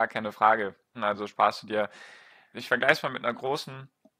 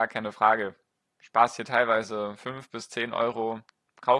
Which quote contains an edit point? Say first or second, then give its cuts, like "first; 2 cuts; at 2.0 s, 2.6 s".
first; 2 cuts; at 0.9 s, 2.5 s